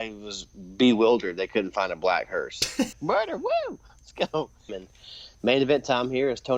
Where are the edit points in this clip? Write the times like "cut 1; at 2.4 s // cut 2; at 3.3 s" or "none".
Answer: cut 1; at 2.9 s // cut 2; at 4.7 s